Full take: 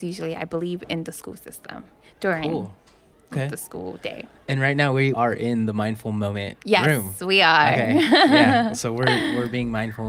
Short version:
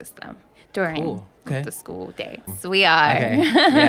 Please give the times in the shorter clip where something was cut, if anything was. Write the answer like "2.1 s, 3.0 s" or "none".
1.4 s, 2.5 s